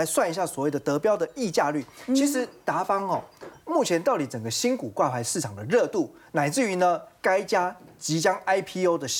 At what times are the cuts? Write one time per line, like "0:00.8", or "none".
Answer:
0:03.6

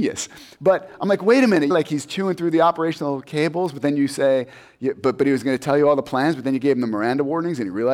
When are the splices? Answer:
0:01.7

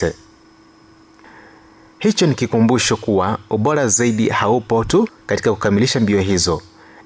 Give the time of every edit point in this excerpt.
0:01.9
0:05.2

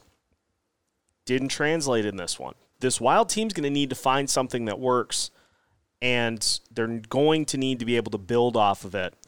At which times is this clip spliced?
0:01.1
0:02.7

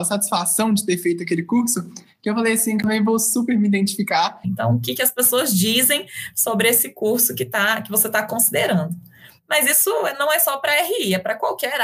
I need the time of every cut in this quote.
0:04.4

